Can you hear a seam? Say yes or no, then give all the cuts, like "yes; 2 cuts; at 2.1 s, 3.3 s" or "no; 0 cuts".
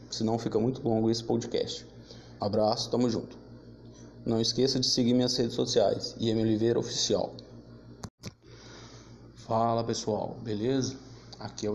yes; 1 cut; at 2.4 s